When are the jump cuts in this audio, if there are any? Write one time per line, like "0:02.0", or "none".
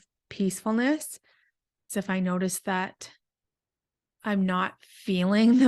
0:01.9